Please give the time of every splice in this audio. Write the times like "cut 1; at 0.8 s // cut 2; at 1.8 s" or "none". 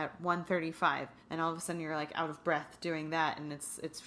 cut 1; at 1.2 s